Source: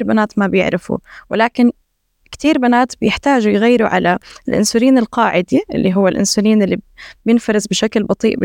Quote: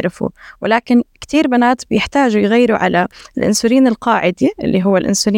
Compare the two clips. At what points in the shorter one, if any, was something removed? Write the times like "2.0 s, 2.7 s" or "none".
1.1 s